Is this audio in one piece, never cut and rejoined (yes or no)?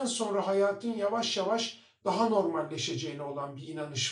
yes